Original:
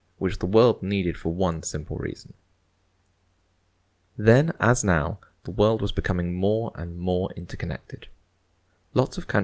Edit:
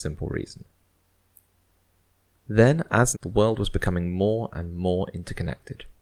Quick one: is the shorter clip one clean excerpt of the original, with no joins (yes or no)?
no